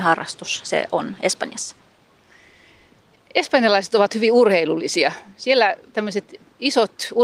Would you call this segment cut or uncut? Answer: uncut